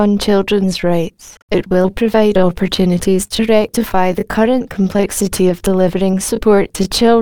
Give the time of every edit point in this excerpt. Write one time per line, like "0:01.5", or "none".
0:01.4